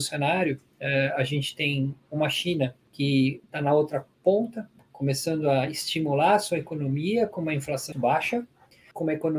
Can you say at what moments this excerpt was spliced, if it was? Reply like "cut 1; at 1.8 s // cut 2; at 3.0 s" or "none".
cut 1; at 7.9 s